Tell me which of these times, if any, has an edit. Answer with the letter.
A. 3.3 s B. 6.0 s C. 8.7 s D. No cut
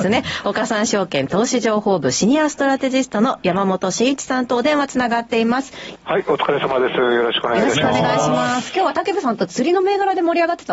B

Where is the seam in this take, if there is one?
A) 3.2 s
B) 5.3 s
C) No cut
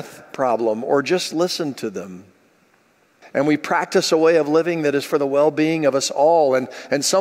A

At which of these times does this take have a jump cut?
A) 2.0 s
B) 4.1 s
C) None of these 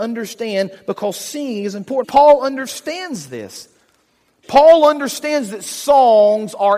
A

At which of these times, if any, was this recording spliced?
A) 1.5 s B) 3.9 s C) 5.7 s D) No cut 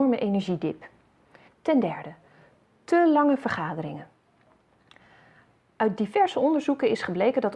A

